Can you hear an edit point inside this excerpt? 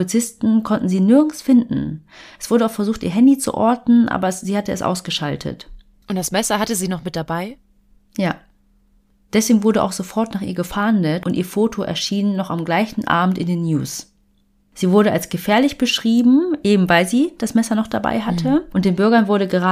no; 0 cuts

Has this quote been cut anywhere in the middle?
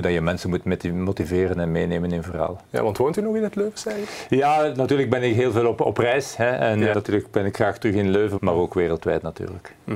yes; 2 cuts; at 6.9 s, 8.4 s

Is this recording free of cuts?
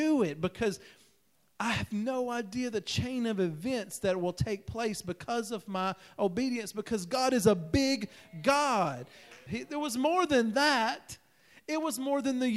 no; 1 cut; at 9.5 s

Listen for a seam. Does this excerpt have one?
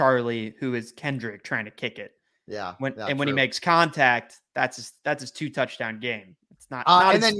no; 0 cuts

